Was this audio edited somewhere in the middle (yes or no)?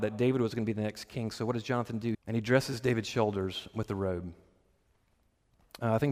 yes